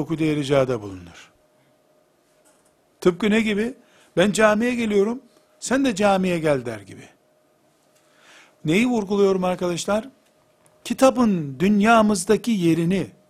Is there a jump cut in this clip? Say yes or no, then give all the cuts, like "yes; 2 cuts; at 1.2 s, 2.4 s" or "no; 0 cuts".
no; 0 cuts